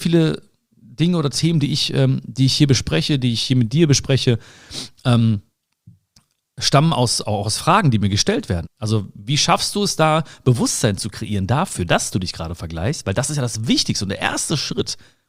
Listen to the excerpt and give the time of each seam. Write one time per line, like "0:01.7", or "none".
0:08.6